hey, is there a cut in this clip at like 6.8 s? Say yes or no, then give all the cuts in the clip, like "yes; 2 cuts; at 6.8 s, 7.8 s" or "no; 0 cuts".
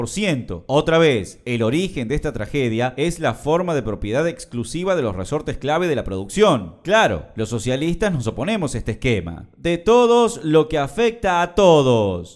no; 0 cuts